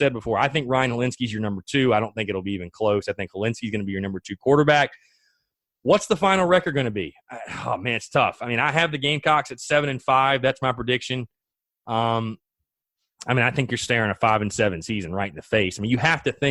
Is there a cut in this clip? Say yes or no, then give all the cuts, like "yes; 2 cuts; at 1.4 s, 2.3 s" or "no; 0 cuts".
no; 0 cuts